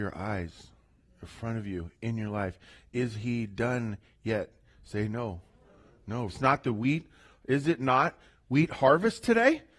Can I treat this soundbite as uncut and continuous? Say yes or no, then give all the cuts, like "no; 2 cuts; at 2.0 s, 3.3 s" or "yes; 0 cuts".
no; 1 cut; at 6.3 s